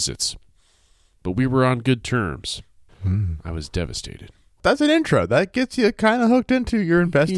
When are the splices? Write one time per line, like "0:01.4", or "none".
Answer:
0:02.9
0:04.6